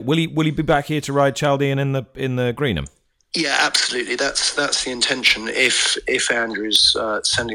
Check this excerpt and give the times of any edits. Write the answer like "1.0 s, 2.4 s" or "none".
none